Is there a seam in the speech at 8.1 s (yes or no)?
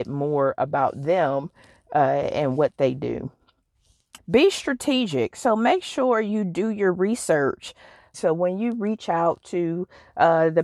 yes